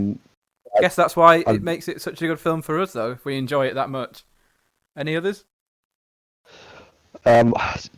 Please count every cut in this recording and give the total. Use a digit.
1